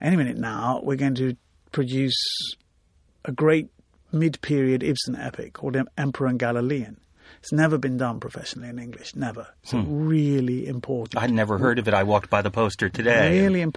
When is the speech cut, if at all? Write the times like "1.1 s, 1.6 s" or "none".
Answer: none